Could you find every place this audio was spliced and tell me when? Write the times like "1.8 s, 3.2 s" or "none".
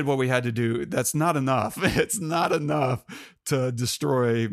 none